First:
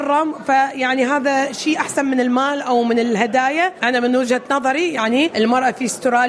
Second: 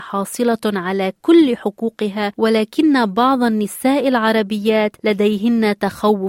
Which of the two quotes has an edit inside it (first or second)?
first